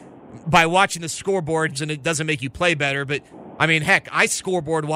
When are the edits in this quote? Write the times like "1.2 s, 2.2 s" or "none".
1.7 s

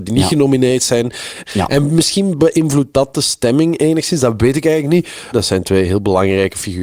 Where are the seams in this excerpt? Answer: 1.5 s, 5.3 s

